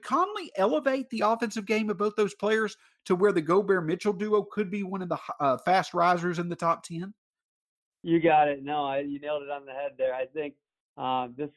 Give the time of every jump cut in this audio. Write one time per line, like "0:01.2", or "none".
none